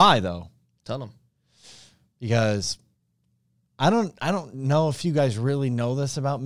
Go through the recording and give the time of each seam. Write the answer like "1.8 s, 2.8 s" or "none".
none